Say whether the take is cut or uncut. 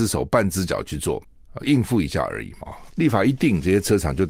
cut